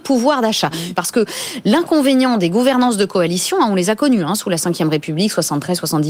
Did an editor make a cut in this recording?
yes; 1 cut; at 0.9 s

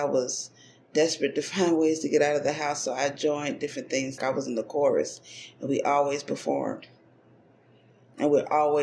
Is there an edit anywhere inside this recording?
yes; 1 cut; at 4.2 s

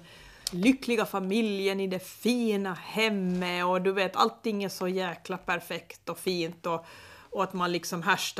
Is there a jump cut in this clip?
no; 0 cuts

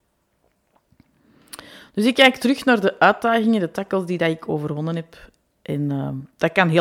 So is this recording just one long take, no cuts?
yes; 0 cuts

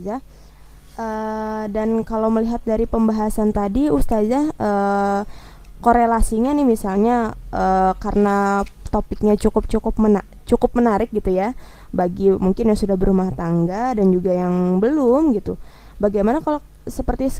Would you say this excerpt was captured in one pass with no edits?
yes; 0 cuts

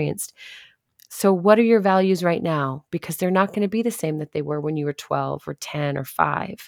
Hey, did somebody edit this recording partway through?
no; 0 cuts

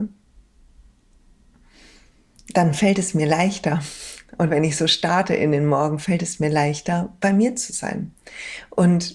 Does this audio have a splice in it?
no; 0 cuts

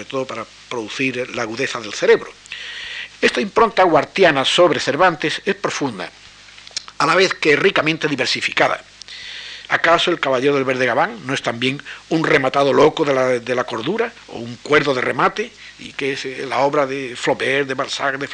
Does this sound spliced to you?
yes; 2 cuts; at 3.1 s, 9.7 s

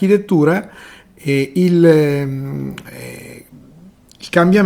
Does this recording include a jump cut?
no; 0 cuts

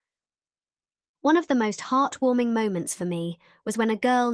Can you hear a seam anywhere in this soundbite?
no; 0 cuts

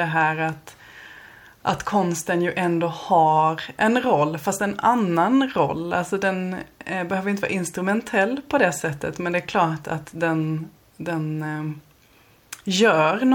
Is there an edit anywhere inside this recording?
no; 0 cuts

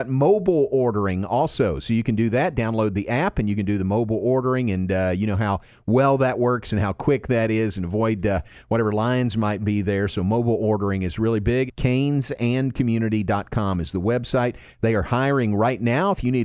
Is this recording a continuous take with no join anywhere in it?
no; 1 cut; at 11.7 s

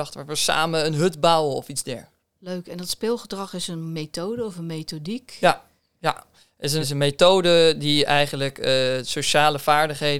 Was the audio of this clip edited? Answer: yes; 1 cut; at 6.8 s

